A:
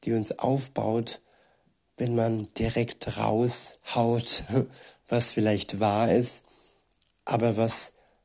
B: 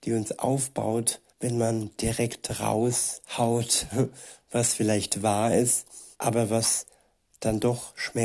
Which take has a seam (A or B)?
B